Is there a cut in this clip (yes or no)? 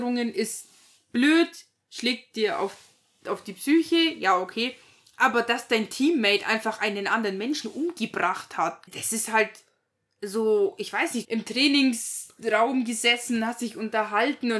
yes